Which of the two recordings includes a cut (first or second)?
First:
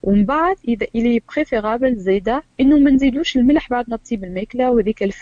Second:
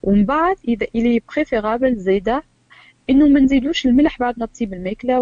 first